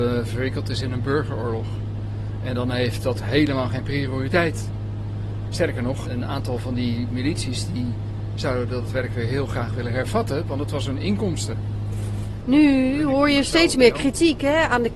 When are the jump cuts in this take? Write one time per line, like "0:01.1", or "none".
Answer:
0:06.0
0:12.4